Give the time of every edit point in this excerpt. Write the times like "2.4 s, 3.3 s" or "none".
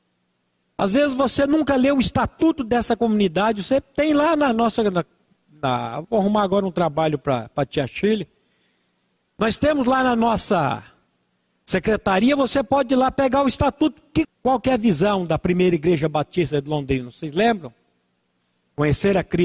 14.2 s

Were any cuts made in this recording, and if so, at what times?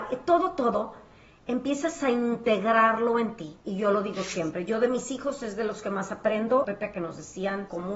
6.6 s

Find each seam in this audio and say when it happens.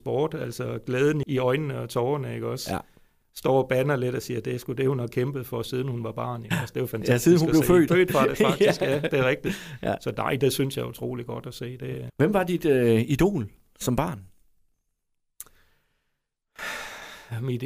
1.2 s, 7.9 s, 12.1 s

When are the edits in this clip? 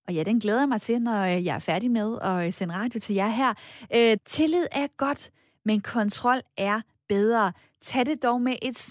4.2 s

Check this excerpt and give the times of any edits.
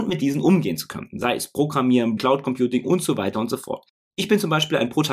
2.2 s, 4.0 s

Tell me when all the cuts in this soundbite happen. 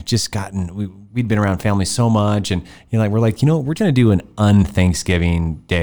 3.8 s

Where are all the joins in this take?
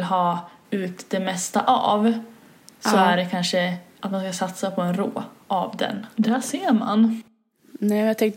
6.1 s

